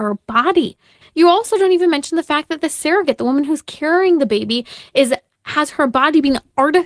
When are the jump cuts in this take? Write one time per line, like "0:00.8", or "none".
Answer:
0:01.0